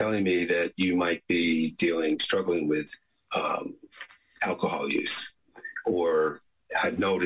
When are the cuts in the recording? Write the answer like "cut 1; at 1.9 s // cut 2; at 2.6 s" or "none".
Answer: none